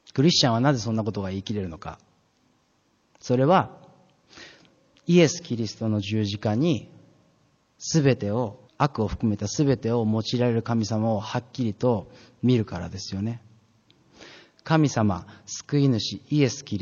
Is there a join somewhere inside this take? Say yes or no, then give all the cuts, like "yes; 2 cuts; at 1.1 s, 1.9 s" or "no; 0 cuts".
yes; 1 cut; at 8.7 s